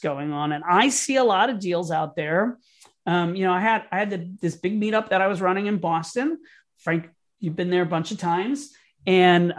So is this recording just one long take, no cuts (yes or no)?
yes